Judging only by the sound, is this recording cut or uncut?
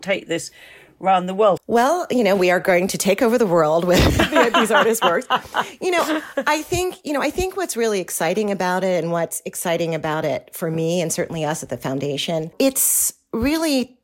cut